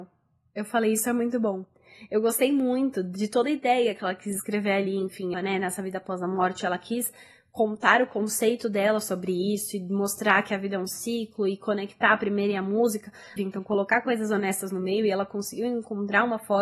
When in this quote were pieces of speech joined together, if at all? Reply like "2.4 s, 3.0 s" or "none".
5.3 s, 13.4 s

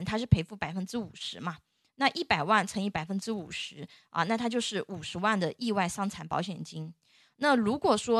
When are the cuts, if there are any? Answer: none

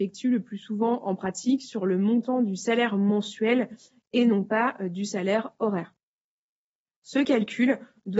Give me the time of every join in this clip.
none

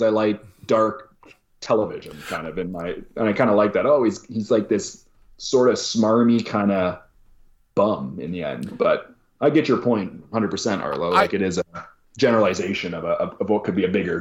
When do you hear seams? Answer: none

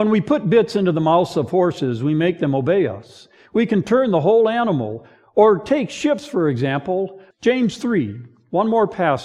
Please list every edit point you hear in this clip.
7.3 s

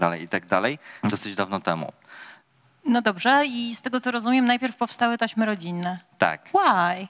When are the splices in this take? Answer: 1.0 s

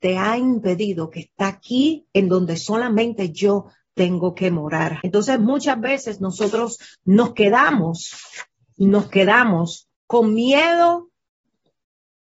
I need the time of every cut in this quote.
5.0 s, 10.0 s

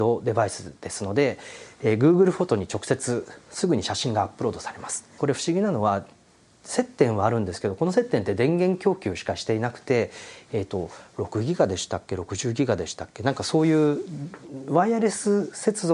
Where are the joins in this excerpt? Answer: 5.2 s

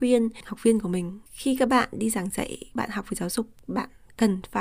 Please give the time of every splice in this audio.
1.3 s

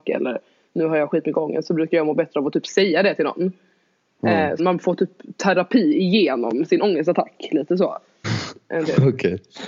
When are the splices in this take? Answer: 4.6 s, 8.2 s

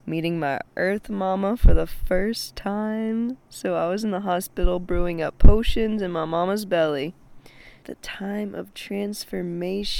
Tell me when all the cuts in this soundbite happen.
7.8 s

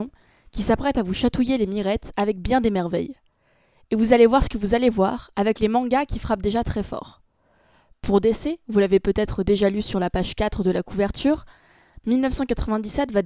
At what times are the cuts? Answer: none

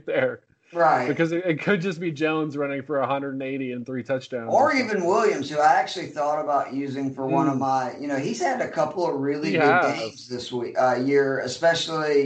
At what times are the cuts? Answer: none

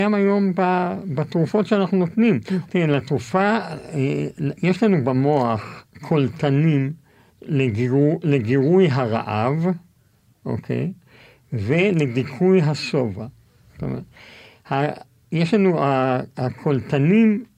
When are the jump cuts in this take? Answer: 2.7 s

